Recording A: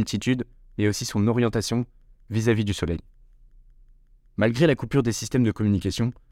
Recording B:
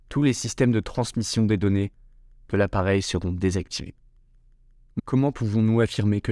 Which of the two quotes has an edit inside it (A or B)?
B